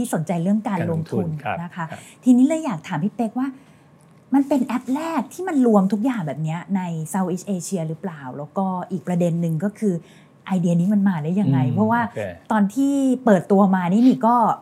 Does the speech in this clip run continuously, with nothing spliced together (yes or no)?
yes